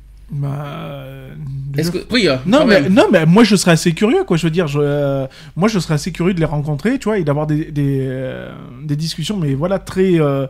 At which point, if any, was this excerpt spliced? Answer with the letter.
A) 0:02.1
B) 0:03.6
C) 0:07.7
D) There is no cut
A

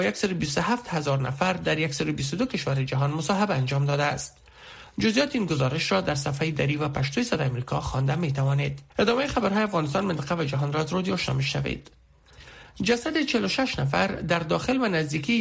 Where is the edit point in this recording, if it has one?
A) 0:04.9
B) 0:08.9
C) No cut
B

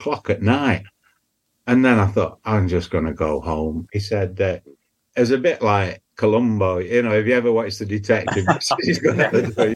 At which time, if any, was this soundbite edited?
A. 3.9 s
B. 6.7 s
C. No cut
A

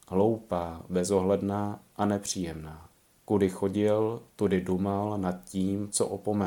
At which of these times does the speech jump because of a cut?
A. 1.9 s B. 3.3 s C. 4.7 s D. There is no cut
B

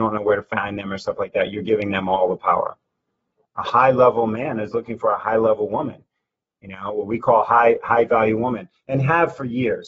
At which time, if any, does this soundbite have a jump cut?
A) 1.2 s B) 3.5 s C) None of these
B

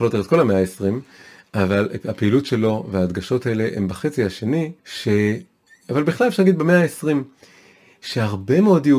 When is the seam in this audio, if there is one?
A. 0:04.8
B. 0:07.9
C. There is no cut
A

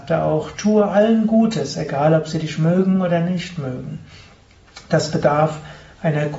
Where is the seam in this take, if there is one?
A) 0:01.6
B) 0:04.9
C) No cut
C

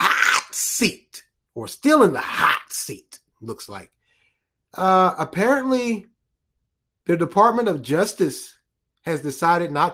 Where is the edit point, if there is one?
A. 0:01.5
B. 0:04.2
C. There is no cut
C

